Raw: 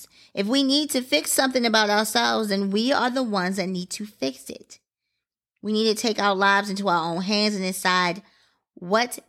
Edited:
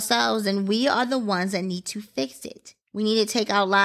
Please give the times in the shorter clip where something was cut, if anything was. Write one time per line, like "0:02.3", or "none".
0:02.8